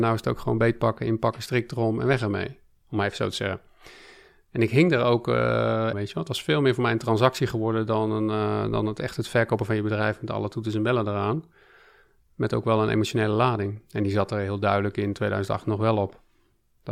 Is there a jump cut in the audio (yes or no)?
yes